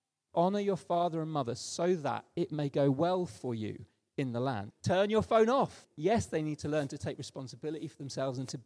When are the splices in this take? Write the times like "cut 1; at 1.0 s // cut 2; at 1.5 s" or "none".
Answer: cut 1; at 4.7 s // cut 2; at 5.8 s